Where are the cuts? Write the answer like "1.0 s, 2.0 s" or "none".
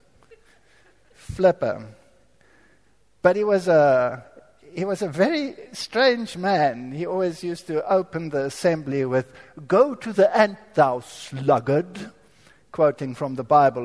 none